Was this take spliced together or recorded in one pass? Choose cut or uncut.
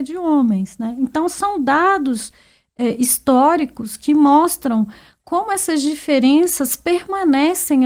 uncut